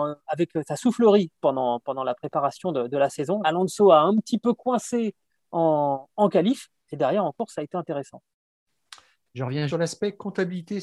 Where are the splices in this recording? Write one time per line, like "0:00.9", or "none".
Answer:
0:03.4
0:09.7